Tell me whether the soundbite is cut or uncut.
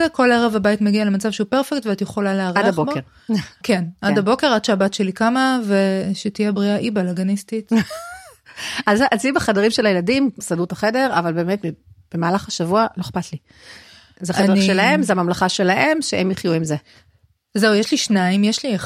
cut